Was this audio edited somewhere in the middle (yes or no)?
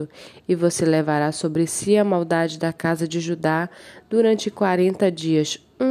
no